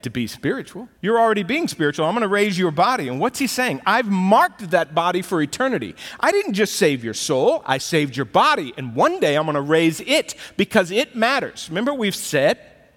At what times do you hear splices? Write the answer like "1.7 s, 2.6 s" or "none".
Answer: 0.9 s